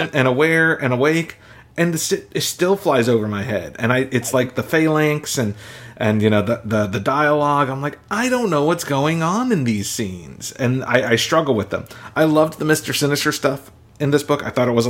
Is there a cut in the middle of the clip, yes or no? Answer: no